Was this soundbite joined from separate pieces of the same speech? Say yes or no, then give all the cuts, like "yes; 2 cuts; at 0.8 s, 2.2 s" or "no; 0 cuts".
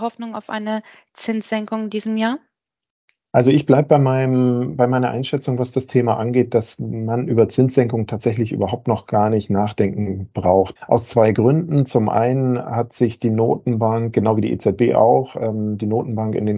yes; 1 cut; at 10.8 s